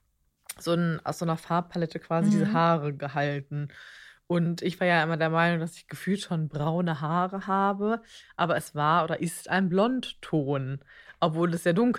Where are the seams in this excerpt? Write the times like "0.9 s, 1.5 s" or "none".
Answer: none